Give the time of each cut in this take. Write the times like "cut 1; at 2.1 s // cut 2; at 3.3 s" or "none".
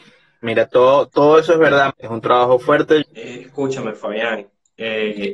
cut 1; at 1.9 s // cut 2; at 3.0 s